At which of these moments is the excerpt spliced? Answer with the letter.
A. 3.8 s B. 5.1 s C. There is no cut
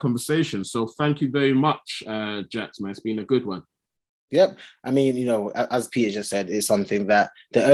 C